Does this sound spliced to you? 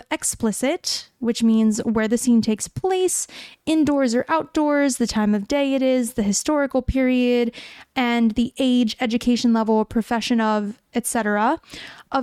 no; 0 cuts

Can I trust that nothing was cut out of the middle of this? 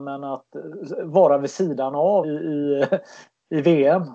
no; 1 cut; at 2.2 s

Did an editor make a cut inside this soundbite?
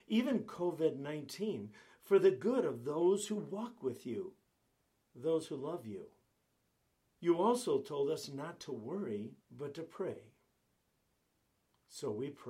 yes; 2 cuts; at 7.2 s, 9.4 s

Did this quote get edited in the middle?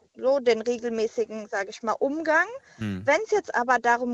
no; 0 cuts

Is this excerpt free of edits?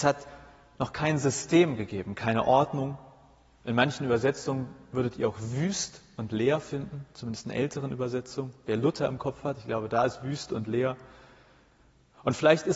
yes; 0 cuts

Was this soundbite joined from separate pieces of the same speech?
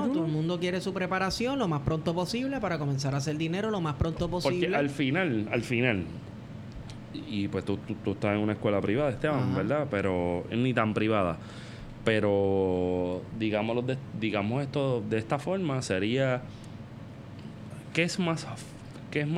no; 0 cuts

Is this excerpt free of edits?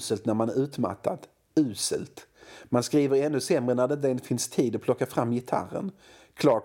yes; 0 cuts

